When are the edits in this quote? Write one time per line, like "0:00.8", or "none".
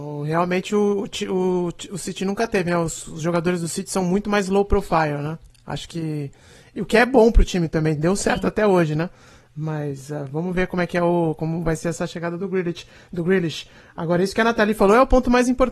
none

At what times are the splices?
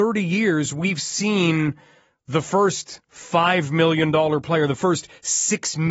none

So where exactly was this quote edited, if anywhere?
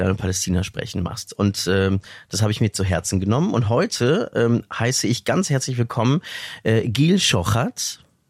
none

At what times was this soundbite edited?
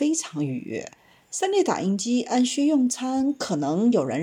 0:01.2

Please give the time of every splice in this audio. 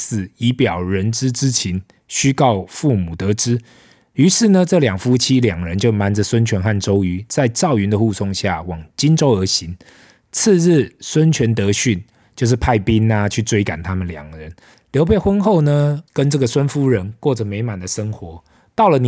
0:14.7
0:16.1

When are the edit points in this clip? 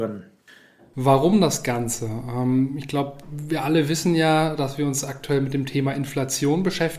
0:00.9

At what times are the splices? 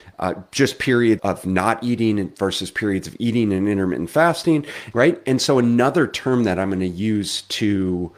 0:01.2
0:04.9

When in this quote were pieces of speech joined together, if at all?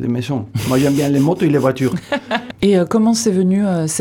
0:02.5

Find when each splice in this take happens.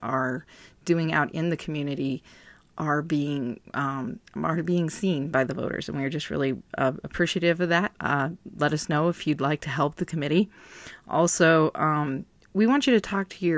0:07.9

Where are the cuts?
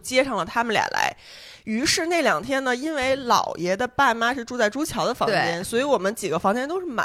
none

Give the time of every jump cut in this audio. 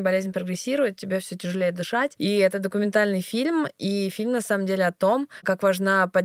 0:02.2

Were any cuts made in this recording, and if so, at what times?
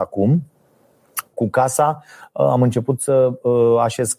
0:01.3

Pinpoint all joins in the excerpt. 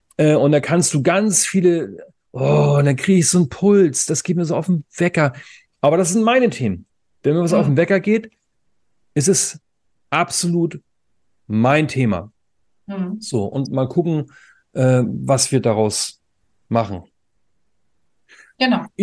none

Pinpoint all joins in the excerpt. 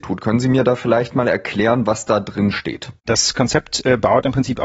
0:03.0

